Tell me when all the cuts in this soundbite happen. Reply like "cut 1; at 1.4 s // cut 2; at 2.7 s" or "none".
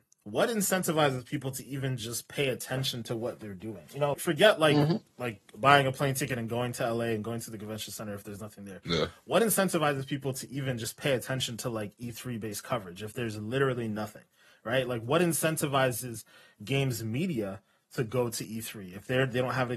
cut 1; at 4.1 s